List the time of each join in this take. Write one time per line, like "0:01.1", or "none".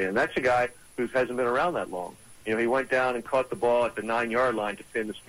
none